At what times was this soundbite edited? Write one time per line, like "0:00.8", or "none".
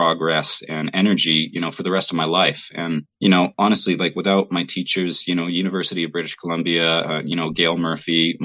0:03.1